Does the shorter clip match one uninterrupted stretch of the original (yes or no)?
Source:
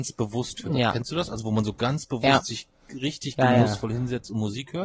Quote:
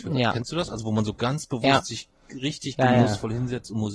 yes